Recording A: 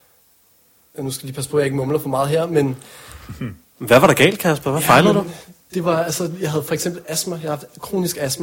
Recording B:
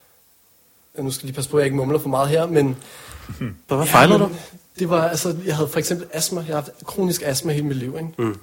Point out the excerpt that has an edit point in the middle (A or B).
B